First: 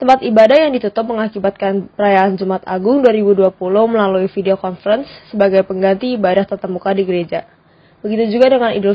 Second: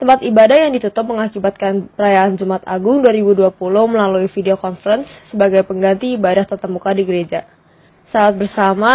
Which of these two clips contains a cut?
second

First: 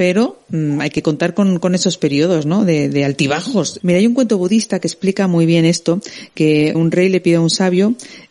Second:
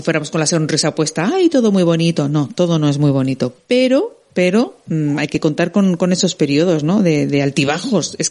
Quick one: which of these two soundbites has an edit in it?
first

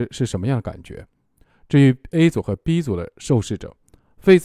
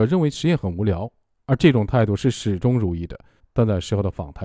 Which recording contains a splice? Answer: second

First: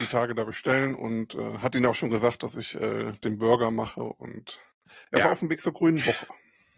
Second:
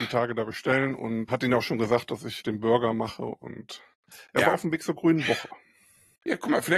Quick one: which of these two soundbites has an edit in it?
second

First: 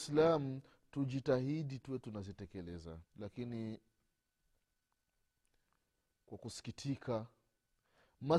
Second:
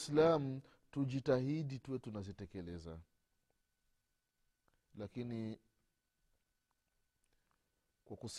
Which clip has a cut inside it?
first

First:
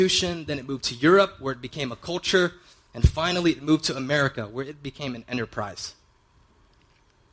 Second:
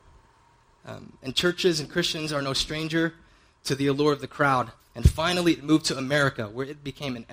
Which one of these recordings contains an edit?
second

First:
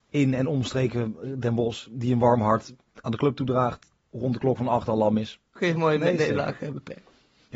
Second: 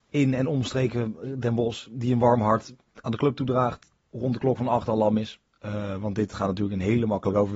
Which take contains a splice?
first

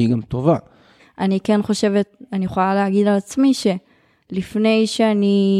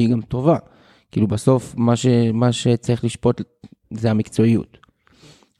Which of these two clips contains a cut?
first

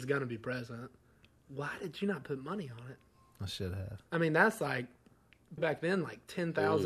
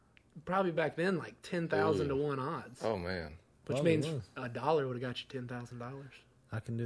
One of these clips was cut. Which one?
first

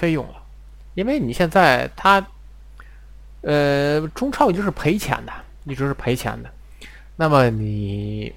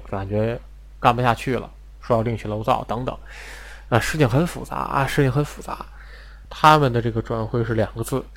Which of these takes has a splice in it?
second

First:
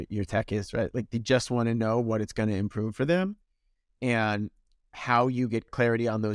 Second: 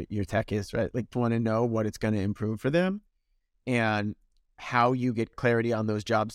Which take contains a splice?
second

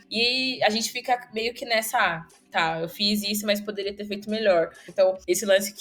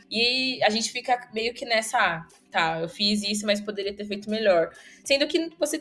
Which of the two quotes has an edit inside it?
first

